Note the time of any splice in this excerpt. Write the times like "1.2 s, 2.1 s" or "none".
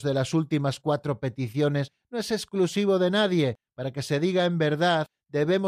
none